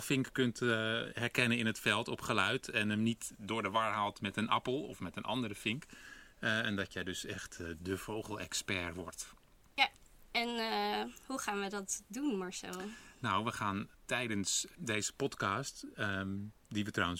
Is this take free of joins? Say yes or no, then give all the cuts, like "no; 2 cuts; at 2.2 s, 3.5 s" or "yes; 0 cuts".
yes; 0 cuts